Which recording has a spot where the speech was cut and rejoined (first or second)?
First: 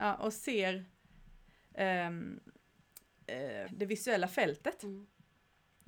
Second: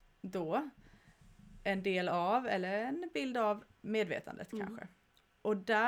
first